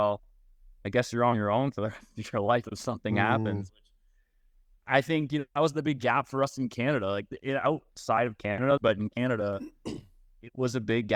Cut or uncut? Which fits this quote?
cut